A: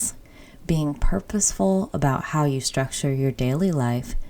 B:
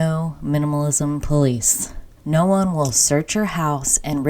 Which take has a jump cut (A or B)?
B